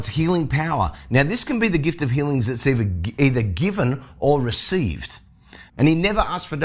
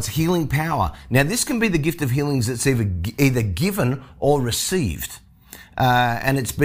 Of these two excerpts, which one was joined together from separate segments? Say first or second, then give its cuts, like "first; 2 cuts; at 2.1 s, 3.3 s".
first; 1 cut; at 5.7 s